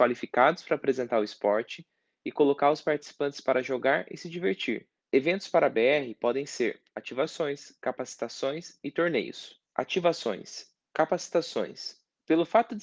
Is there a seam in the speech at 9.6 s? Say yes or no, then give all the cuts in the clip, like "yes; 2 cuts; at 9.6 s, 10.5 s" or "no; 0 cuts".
yes; 3 cuts; at 5.0 s, 9.6 s, 10.9 s